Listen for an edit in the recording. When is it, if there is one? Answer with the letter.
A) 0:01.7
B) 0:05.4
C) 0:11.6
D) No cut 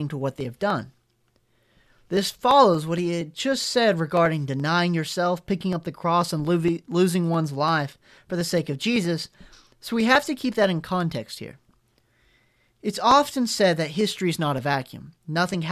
D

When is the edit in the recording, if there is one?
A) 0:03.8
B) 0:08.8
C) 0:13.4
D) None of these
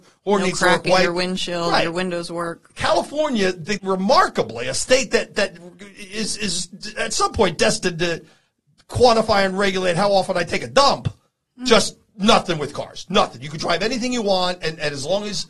A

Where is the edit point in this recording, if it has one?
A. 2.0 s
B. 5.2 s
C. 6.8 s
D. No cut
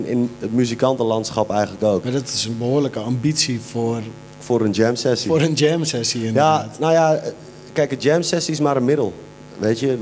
A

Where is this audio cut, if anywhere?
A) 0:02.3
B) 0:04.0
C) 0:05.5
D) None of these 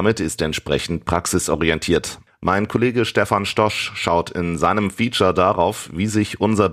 A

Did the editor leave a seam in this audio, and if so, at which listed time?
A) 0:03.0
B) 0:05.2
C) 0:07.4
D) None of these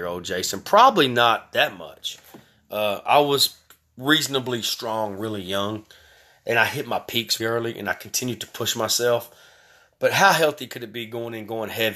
C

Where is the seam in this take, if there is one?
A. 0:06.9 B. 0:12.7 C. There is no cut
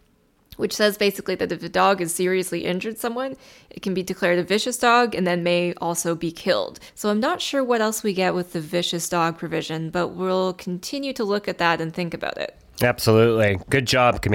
A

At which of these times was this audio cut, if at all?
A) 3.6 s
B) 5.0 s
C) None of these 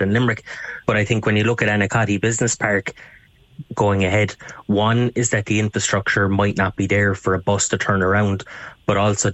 A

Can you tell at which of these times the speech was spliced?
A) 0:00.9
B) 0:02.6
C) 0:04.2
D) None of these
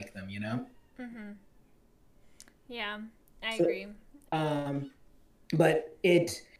C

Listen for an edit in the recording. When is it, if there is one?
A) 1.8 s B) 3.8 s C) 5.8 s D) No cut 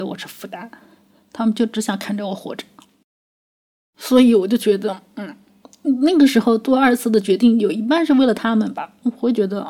D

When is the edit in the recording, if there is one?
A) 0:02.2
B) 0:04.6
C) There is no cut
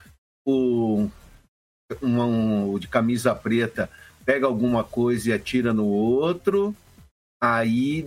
C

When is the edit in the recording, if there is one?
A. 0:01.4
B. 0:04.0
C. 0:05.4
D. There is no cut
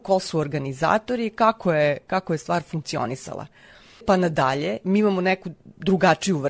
B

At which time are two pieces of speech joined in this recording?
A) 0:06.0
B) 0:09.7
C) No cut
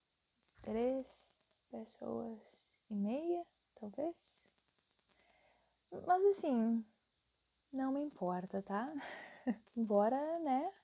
B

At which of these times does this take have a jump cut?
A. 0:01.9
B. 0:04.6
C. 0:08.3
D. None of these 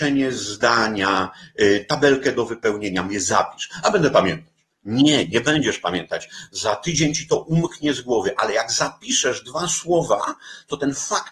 D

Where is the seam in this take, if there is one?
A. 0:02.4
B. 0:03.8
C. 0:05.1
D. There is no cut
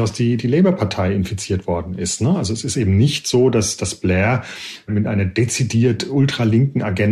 B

